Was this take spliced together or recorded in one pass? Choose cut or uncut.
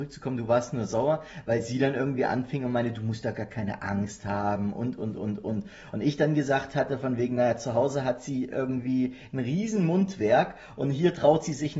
uncut